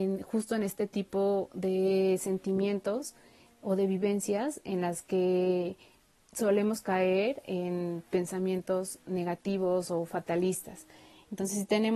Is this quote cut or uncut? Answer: uncut